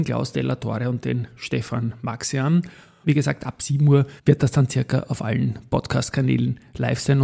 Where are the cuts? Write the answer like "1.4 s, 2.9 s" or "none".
3.0 s, 4.2 s